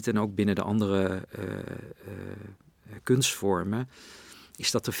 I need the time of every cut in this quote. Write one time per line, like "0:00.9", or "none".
none